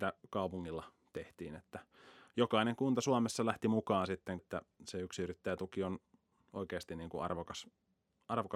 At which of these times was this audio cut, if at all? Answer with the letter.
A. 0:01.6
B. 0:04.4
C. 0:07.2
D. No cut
B